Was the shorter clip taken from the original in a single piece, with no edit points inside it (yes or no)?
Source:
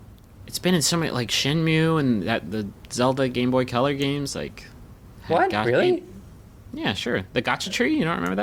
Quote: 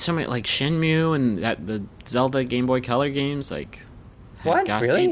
yes